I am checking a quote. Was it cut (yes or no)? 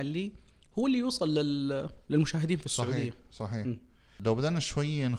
no